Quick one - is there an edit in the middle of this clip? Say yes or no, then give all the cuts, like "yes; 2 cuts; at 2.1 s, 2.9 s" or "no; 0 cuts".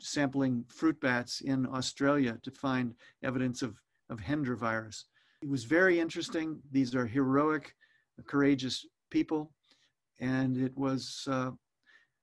no; 0 cuts